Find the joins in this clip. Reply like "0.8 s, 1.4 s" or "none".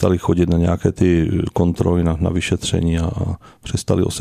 none

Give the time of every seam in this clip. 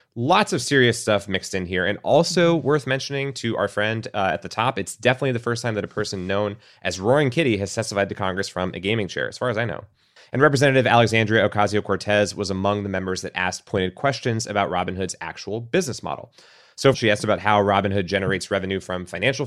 10.2 s, 16.9 s

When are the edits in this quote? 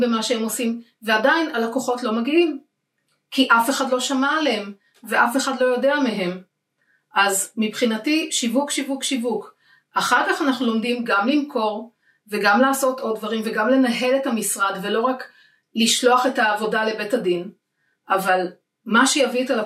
none

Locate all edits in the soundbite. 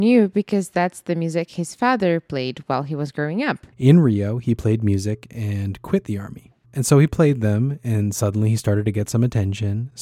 3.7 s, 6.6 s

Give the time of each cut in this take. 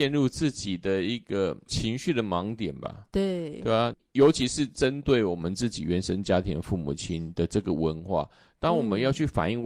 none

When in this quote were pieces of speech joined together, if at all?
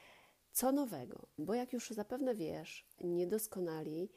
1.4 s, 3.0 s

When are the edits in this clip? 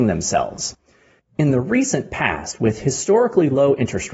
1.2 s

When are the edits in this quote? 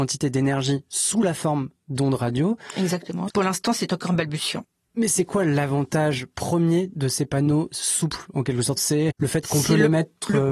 3.3 s, 8.8 s

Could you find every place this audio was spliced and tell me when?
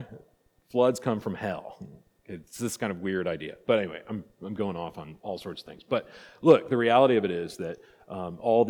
none

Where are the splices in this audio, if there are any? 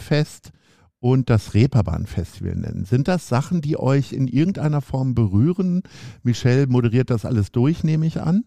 none

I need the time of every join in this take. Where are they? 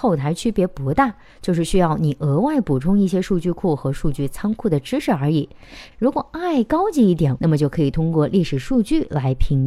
5.9 s, 7.4 s

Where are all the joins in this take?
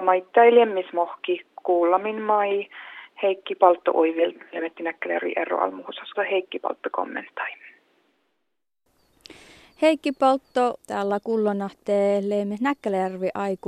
6.1 s, 10.8 s

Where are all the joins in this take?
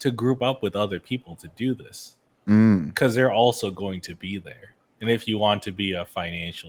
none

